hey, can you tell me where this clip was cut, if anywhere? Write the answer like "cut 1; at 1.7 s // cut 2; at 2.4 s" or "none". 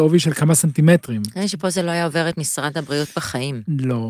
none